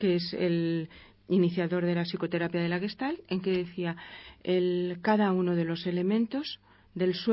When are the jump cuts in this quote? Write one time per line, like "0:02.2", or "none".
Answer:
none